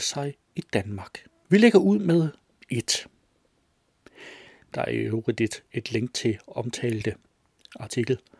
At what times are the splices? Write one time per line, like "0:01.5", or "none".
0:01.4
0:04.6